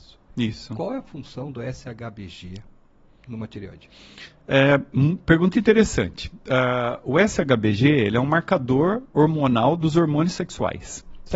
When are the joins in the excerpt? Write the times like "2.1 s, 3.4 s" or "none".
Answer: 5.5 s